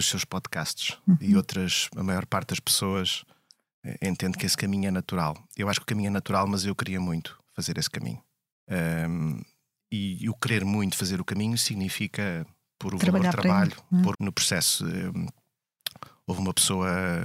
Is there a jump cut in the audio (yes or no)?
yes